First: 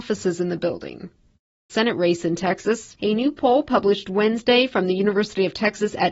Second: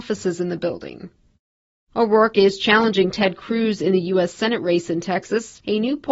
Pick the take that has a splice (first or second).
first